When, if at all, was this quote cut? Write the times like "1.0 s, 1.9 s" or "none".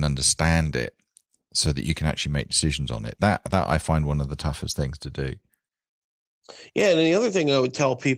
none